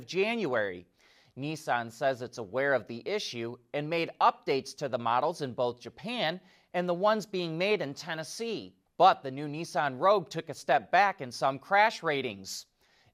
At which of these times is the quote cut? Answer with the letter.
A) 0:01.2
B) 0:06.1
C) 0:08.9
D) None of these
C